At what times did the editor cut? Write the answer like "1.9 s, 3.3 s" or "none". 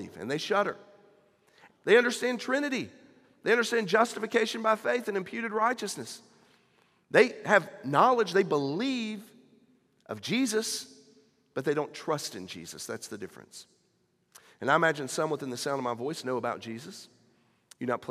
1.7 s